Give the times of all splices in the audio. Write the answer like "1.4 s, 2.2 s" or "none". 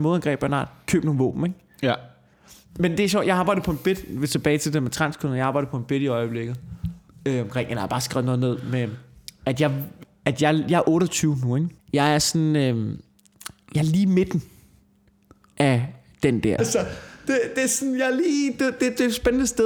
11.8 s, 16.6 s